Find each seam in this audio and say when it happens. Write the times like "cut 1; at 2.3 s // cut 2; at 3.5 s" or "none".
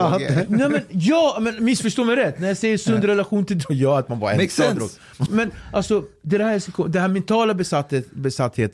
cut 1; at 5.3 s